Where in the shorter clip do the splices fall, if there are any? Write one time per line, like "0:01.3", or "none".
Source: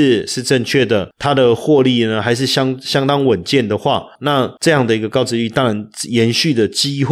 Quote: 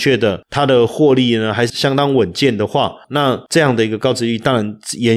0:01.7